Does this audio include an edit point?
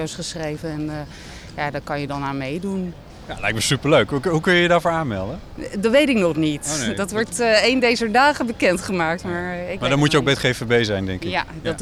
no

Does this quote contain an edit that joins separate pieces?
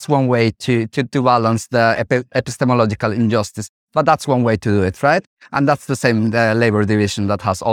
yes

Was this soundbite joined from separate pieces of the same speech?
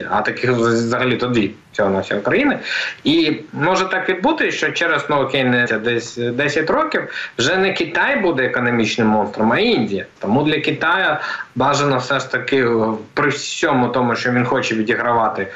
yes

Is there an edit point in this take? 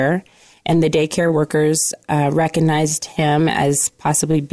no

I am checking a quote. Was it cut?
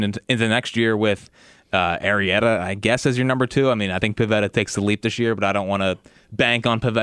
no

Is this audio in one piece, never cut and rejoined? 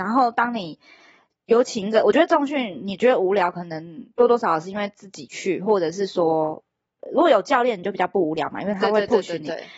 yes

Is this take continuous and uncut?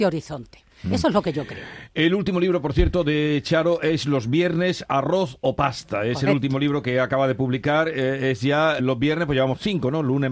no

